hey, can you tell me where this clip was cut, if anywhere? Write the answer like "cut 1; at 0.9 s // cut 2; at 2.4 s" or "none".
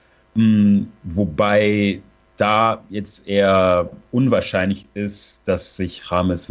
none